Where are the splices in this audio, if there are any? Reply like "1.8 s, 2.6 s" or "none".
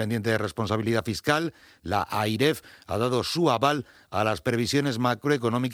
none